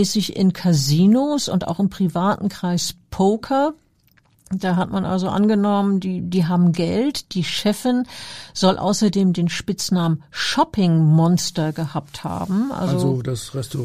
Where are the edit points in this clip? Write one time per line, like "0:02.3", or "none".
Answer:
none

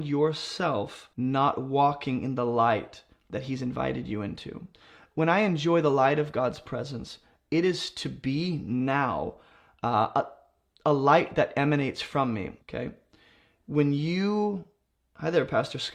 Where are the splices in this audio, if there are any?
0:01.1
0:12.6

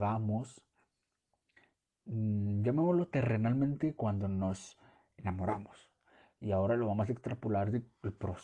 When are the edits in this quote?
none

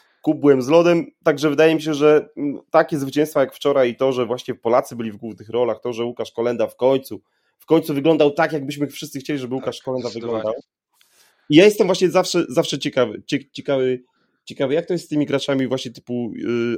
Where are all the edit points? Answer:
none

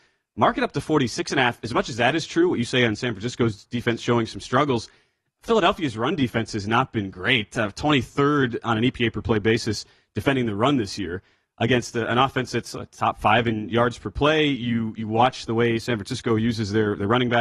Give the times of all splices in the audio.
none

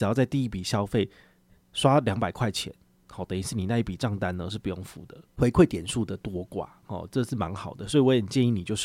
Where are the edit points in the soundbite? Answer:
0:05.3

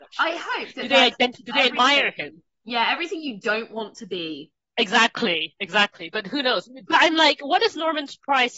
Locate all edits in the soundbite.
0:06.9

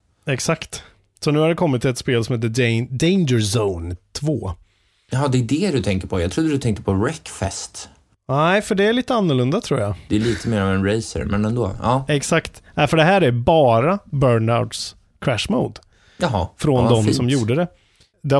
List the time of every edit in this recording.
0:10.1

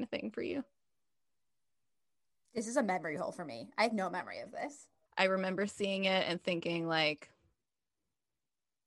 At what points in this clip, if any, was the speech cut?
0:05.1

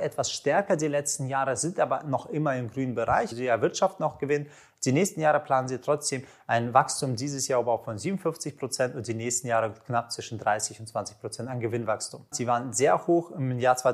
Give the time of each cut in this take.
0:03.3
0:12.3

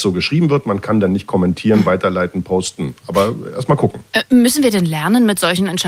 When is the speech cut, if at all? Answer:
none

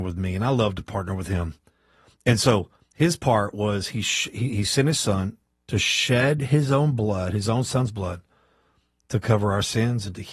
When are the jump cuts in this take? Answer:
none

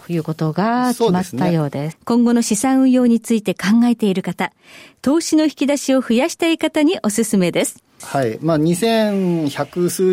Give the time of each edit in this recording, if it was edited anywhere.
0:01.9
0:08.0

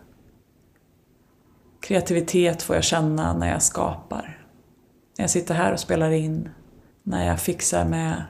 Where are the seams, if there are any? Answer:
0:06.9

